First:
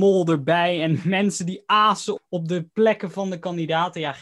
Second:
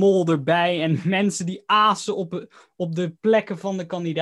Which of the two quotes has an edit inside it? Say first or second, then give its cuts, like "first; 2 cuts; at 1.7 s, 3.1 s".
first; 1 cut; at 2.2 s